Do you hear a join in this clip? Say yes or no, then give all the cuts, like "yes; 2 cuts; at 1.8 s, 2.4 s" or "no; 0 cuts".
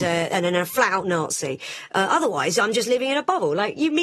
no; 0 cuts